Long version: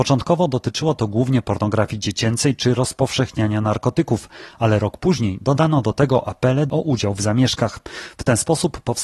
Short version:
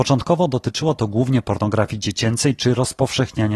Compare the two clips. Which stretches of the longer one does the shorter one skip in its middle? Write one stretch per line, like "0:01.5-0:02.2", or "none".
none